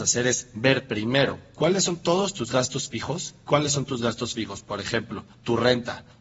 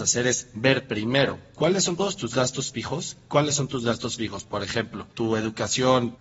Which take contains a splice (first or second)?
second